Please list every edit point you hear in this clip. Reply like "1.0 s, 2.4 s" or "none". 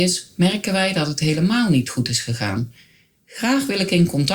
3.1 s

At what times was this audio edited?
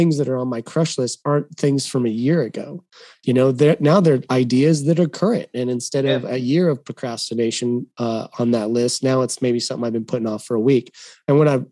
none

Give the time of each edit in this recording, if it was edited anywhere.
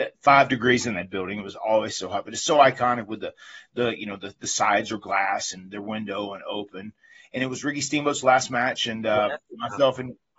none

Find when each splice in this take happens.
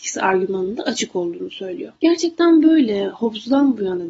2.0 s

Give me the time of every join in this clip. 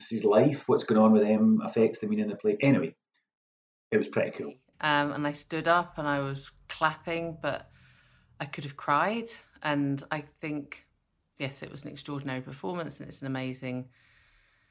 4.7 s

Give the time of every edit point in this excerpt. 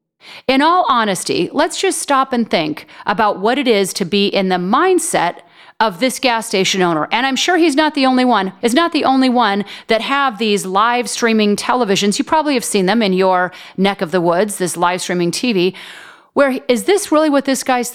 8.6 s

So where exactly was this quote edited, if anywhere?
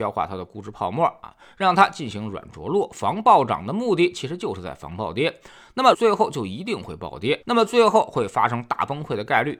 5.9 s, 7.4 s

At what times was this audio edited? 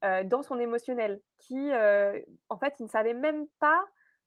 none

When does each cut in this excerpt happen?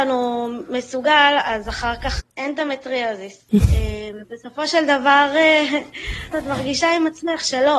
2.2 s, 3.5 s, 6.3 s

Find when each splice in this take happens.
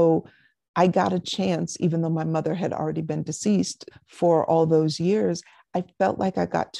3.9 s

